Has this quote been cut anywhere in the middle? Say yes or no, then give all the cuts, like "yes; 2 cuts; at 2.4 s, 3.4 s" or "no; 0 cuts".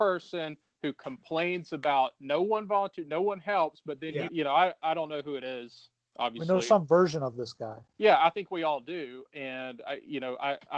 yes; 1 cut; at 4.3 s